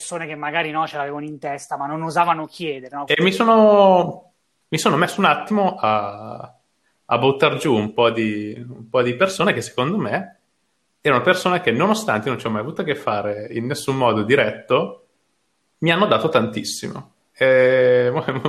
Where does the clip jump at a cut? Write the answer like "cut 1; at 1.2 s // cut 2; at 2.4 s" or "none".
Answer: cut 1; at 3.1 s